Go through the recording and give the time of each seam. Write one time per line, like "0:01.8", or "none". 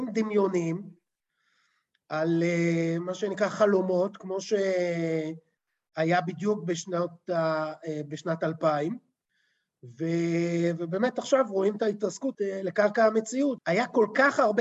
0:12.3
0:13.6